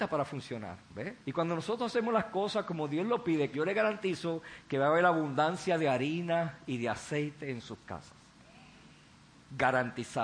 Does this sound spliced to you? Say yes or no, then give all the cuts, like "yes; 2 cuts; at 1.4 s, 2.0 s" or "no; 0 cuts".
yes; 2 cuts; at 1.2 s, 3.5 s